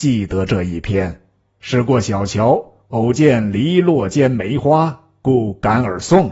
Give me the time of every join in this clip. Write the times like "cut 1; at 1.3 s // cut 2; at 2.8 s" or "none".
none